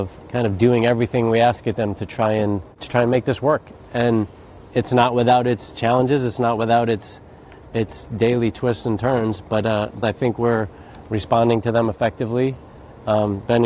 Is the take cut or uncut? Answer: cut